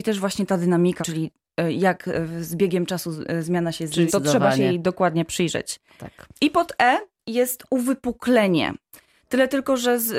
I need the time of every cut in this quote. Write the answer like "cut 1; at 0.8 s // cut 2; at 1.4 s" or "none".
cut 1; at 1.0 s // cut 2; at 4.1 s

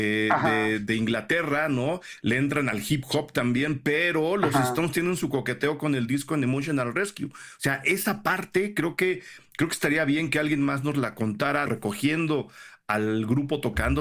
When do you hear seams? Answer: cut 1; at 11.7 s

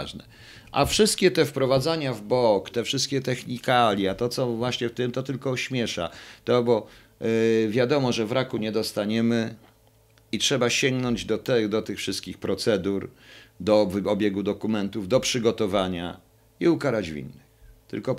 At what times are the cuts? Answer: cut 1; at 2.7 s

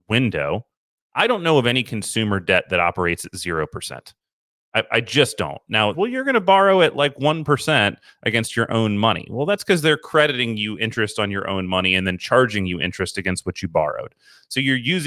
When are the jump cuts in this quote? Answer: cut 1; at 5.9 s

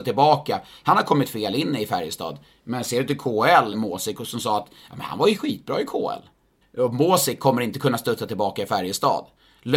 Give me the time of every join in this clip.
cut 1; at 3.7 s // cut 2; at 6.6 s

